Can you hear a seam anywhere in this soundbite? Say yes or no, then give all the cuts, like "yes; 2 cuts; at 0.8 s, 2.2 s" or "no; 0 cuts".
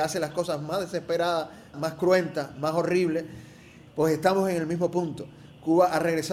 yes; 2 cuts; at 1.7 s, 3.9 s